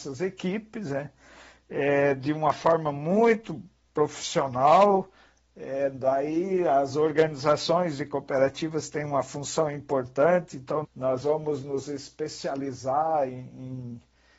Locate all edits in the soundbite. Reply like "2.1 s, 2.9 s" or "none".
10.8 s